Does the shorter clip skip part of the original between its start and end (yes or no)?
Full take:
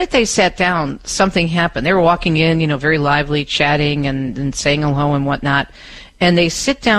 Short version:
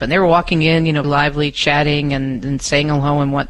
yes